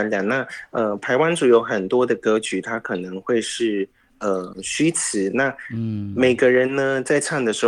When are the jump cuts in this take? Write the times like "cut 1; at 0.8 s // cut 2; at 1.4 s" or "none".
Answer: none